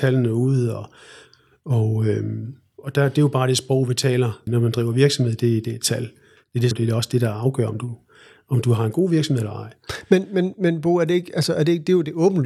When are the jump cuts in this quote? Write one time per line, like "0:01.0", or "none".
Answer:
0:04.5
0:06.7